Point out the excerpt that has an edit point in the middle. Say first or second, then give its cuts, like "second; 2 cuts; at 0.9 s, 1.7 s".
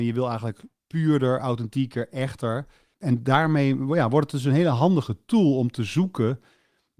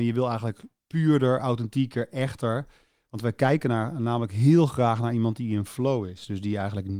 first; 1 cut; at 2.9 s